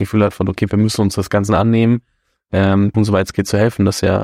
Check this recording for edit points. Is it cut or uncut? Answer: cut